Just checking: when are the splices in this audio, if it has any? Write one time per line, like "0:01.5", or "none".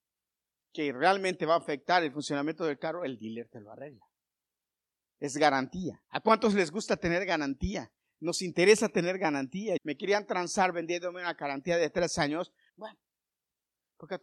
0:06.0
0:09.8
0:12.7